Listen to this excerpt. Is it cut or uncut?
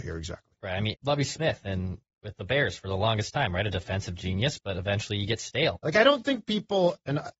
cut